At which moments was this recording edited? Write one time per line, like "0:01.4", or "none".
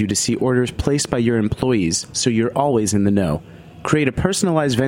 none